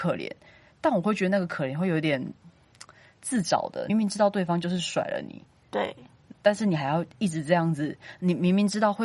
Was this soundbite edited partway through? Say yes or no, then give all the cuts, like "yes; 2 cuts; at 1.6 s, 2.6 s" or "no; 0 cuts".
yes; 1 cut; at 3.9 s